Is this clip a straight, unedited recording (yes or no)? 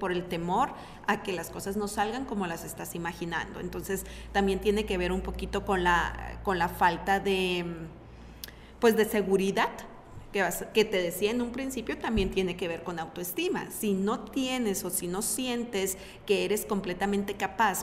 yes